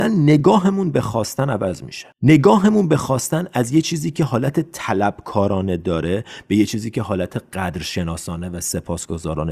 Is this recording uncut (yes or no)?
no